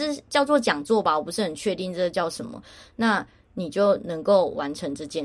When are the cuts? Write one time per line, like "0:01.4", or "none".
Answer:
none